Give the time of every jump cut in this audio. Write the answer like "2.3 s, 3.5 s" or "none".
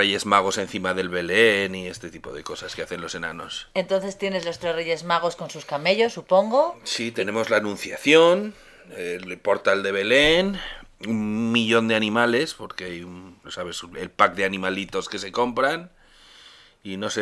13.4 s